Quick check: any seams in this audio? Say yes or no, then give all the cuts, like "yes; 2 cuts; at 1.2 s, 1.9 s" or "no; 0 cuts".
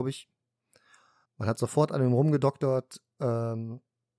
yes; 1 cut; at 1.2 s